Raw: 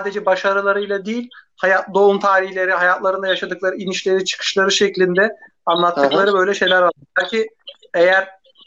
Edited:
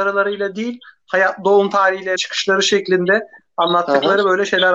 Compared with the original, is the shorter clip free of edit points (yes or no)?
no